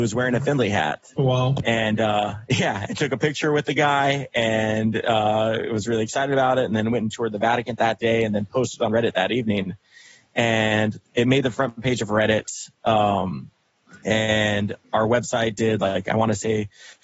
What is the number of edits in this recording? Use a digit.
0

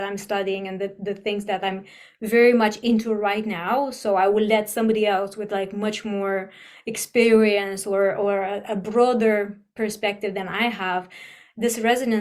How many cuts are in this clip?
0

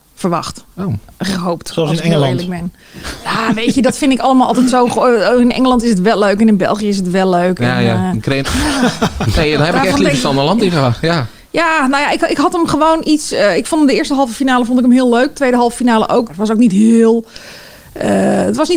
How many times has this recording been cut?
2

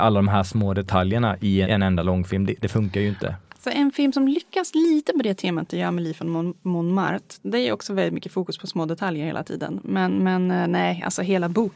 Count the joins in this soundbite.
1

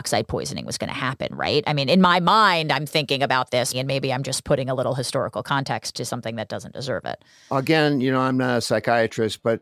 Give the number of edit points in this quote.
1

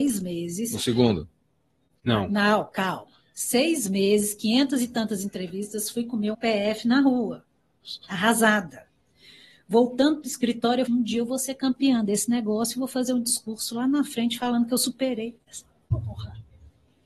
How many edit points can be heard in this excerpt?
2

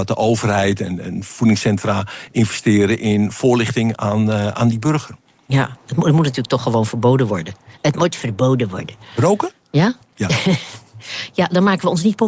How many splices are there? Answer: 1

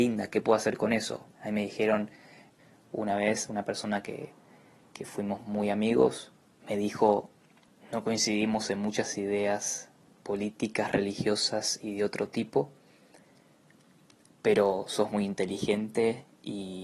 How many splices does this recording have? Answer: 1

